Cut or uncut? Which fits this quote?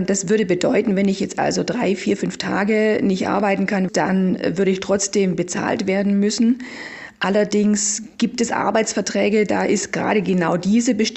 cut